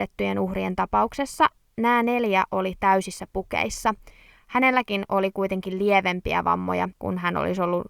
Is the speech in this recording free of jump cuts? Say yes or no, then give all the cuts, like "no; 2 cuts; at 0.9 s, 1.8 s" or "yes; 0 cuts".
no; 2 cuts; at 4.4 s, 6.9 s